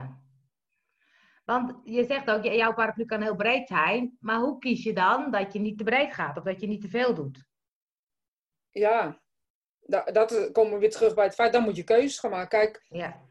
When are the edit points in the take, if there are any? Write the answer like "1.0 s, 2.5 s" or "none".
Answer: none